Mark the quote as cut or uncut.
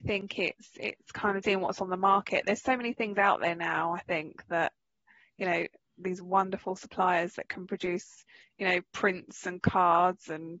cut